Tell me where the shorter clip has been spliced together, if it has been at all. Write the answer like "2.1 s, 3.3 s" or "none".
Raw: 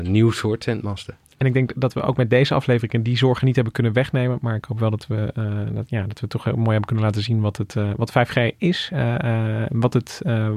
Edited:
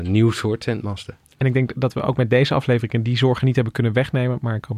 none

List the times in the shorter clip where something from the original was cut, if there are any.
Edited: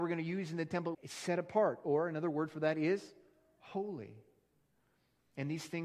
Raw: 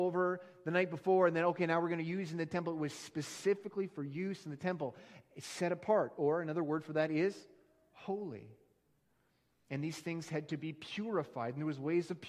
0.9 s

